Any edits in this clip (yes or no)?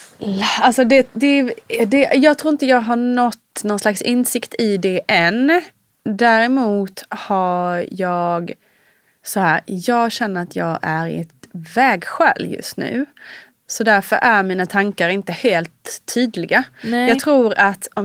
no